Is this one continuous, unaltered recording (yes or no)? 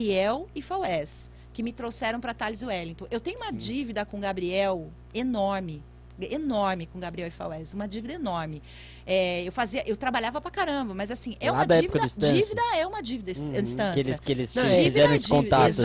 yes